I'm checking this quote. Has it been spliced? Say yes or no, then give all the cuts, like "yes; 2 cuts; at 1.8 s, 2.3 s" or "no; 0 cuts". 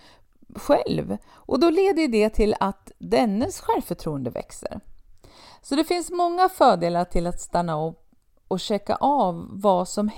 no; 0 cuts